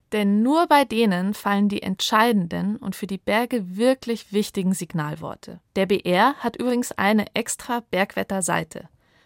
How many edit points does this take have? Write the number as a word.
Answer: one